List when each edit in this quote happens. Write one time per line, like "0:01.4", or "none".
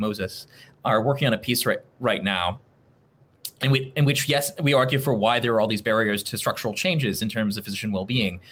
none